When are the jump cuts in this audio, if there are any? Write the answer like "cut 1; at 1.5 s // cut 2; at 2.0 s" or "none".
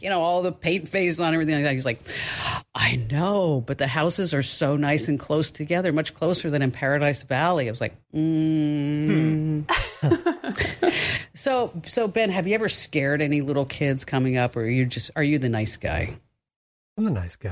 none